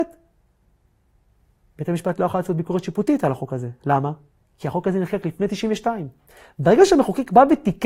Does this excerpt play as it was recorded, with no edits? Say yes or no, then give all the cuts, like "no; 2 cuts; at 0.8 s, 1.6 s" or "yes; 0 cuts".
yes; 0 cuts